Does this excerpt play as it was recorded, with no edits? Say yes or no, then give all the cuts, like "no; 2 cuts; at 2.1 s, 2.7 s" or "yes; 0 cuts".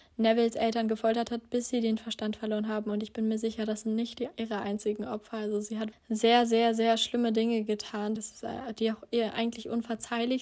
no; 2 cuts; at 5.9 s, 8.2 s